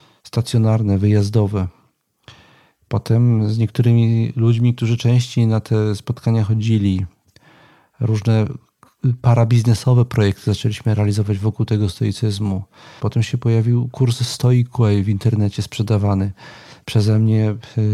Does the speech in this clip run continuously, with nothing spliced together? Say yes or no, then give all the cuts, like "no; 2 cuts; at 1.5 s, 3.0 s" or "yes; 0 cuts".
no; 1 cut; at 13.0 s